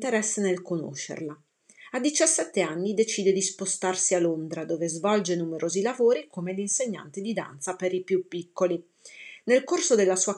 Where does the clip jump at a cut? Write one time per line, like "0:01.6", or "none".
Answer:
none